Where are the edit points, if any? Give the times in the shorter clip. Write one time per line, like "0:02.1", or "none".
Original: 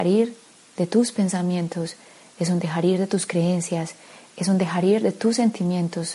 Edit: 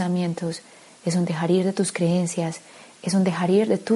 none

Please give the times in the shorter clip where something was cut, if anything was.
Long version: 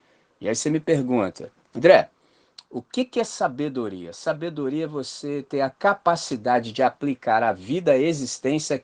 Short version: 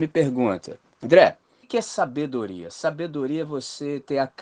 0:01.6

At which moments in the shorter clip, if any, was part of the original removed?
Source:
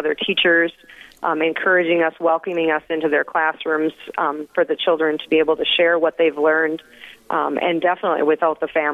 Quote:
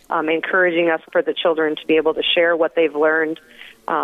0:01.1

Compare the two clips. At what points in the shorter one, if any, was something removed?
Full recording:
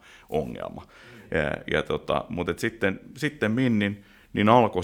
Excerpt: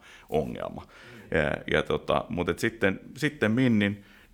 none

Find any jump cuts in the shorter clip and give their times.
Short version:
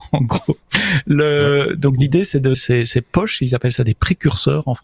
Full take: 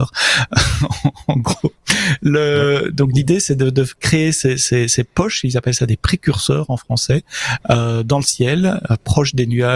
0:02.5

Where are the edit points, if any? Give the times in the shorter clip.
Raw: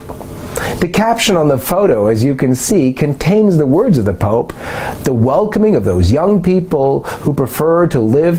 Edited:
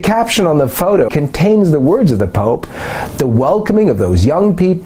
0:01.1

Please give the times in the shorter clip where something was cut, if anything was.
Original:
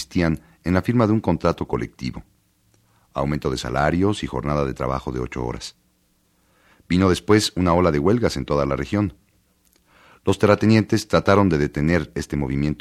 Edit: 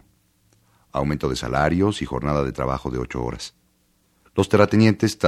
0:04.2

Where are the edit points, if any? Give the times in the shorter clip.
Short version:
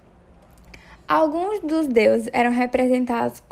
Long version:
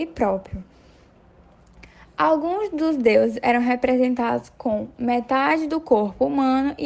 none

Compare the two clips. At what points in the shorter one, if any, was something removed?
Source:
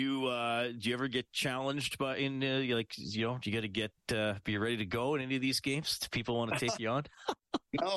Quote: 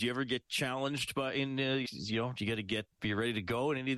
0:01.8
0:03.0

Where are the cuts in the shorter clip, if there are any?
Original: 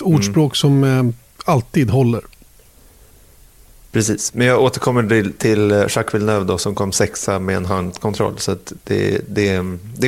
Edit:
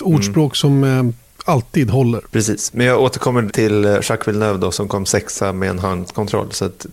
0:02.3
0:03.5

